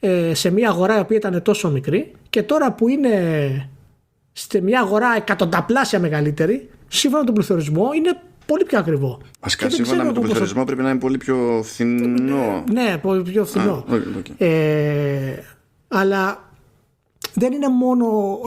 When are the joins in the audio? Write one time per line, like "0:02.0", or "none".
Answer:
0:09.3